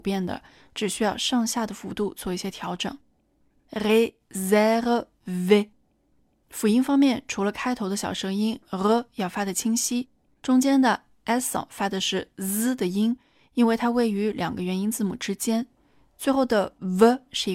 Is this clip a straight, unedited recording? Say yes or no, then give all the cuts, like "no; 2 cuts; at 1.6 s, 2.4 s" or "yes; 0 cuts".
yes; 0 cuts